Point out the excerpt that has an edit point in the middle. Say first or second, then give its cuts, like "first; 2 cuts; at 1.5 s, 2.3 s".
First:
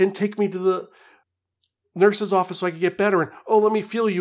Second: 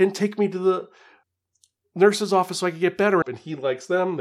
second; 1 cut; at 3.2 s